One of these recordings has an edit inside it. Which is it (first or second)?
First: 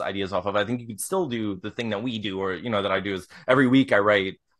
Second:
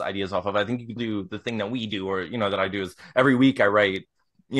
second